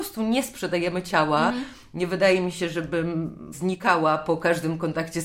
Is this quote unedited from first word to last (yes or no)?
yes